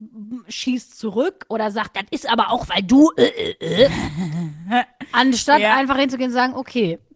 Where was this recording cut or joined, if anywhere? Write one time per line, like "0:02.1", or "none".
none